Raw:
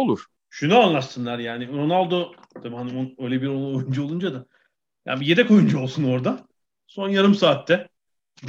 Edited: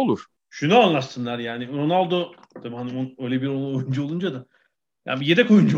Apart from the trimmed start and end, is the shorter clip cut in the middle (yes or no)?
no